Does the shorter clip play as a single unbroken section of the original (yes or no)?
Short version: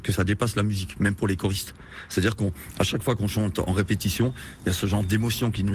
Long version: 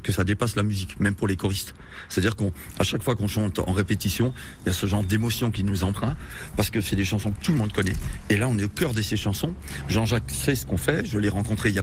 yes